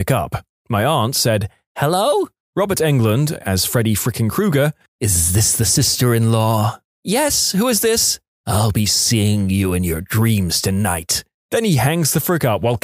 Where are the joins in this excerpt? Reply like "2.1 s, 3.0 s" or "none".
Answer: none